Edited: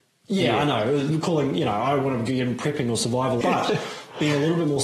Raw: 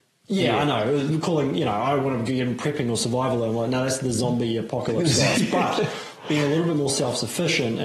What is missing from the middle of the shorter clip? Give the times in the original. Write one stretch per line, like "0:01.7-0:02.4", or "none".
0:03.4-0:05.5